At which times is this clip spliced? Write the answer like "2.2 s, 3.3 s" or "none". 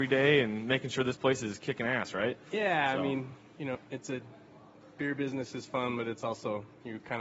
3.7 s